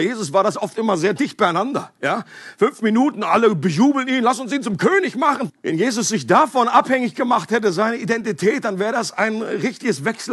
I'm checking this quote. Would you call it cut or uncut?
cut